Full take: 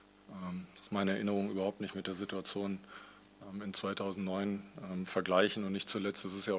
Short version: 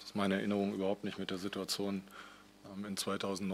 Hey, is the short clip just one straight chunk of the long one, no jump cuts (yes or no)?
yes